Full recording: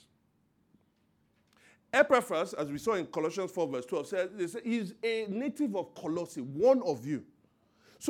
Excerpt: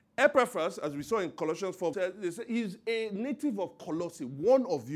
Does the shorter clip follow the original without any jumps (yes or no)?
no